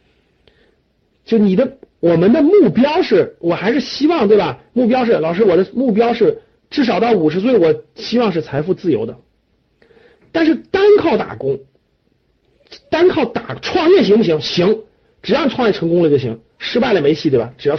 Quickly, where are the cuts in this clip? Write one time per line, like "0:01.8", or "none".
none

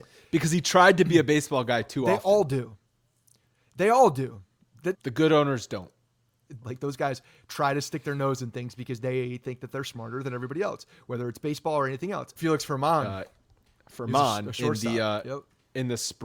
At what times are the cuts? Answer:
0:04.9
0:06.6
0:12.4

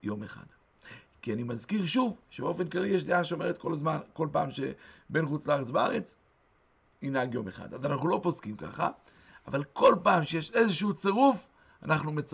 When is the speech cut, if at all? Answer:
none

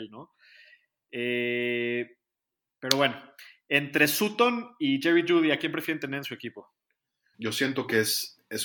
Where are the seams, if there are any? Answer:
0:07.3

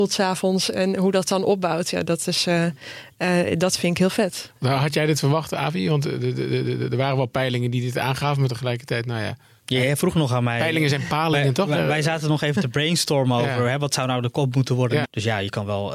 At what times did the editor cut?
0:12.5
0:15.0

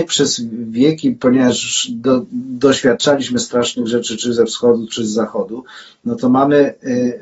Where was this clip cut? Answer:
none

